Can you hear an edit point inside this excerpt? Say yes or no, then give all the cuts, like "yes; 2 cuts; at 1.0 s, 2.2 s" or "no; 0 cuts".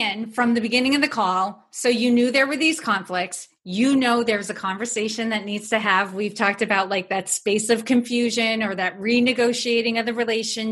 no; 0 cuts